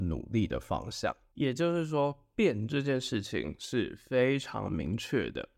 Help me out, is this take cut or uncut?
uncut